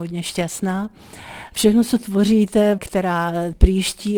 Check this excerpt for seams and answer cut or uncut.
cut